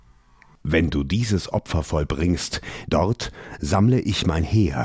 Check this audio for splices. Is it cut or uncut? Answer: cut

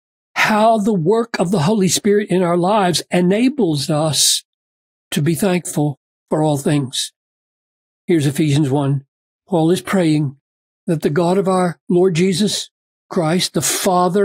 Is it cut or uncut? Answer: uncut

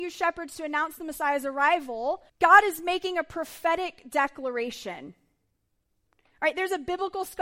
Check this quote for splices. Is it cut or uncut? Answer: cut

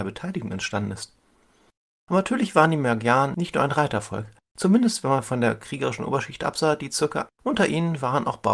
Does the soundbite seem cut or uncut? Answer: cut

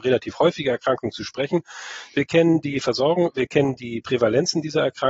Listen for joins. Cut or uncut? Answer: uncut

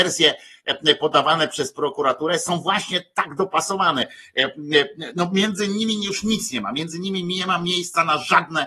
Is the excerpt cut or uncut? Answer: uncut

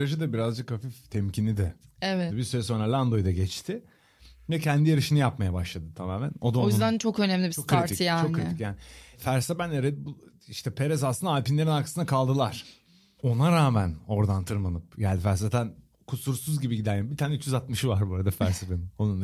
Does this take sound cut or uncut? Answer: cut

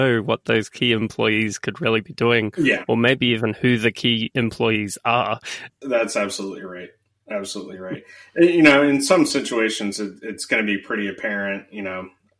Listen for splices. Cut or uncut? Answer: cut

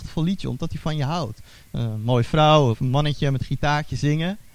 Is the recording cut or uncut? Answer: cut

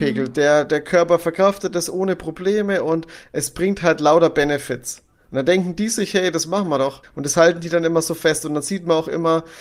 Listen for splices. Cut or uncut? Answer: cut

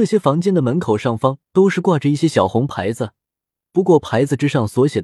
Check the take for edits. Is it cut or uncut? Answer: cut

